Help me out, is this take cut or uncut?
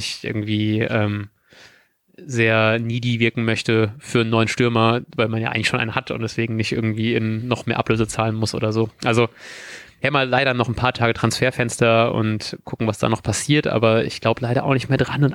uncut